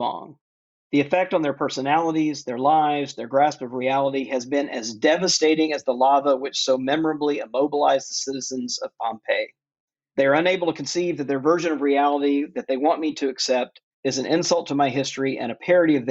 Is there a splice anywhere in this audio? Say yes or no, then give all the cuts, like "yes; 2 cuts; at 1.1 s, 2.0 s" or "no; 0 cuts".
yes; 1 cut; at 13.9 s